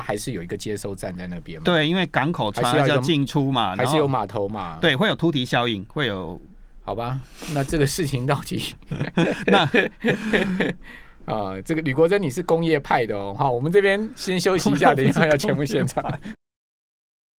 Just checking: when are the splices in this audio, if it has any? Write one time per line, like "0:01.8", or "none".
none